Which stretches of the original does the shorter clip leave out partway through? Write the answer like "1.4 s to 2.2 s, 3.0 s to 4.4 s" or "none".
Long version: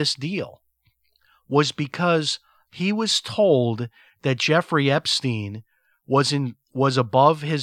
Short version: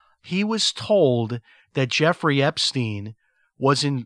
none